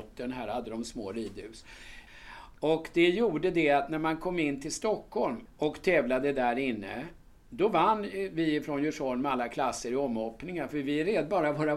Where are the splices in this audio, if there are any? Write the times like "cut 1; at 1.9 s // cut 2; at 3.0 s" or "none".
cut 1; at 2.1 s // cut 2; at 5.5 s